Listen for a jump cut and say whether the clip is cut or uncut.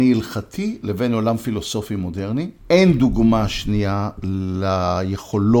cut